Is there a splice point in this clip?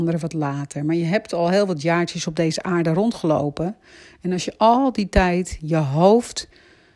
no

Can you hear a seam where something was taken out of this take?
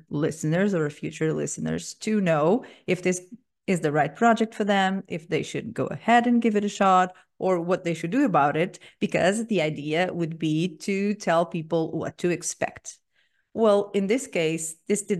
no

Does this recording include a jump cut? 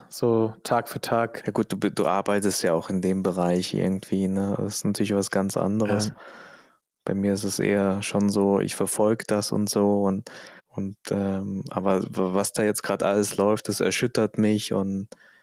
yes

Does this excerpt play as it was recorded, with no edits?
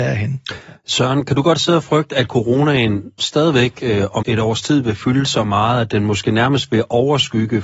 no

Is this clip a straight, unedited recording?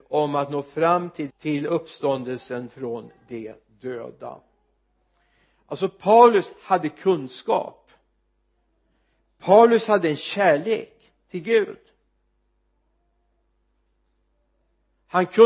no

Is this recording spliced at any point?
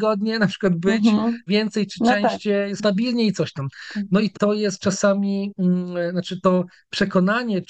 yes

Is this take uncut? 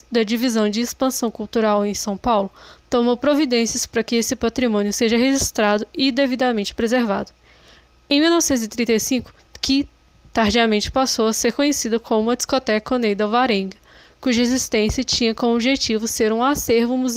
no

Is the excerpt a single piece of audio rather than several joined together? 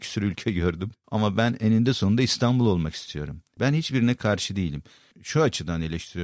no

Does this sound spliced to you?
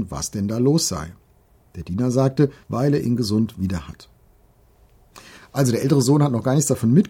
yes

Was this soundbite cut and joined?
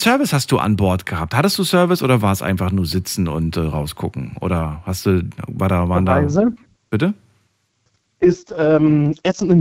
no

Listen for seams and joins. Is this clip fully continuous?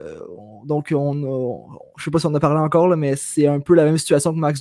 yes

